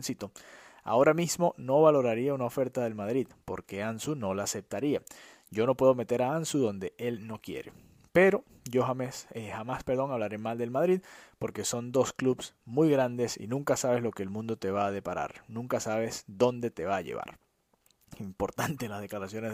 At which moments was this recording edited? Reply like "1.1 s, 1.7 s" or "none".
none